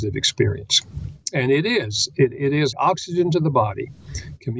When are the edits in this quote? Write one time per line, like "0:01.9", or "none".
0:02.7